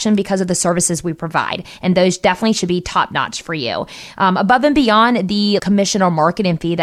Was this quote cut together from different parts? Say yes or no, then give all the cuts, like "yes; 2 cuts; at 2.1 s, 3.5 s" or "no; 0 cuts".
yes; 1 cut; at 5.6 s